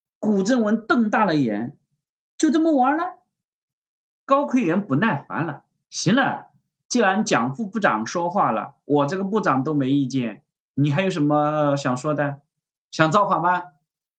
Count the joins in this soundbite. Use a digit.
1